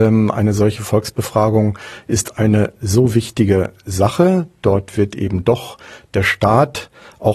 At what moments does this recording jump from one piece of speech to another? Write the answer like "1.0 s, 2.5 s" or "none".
none